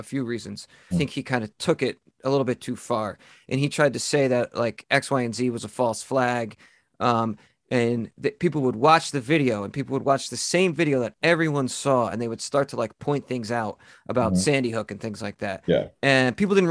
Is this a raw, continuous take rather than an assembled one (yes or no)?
no